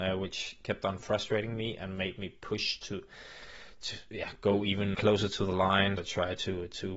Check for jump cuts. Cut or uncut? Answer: cut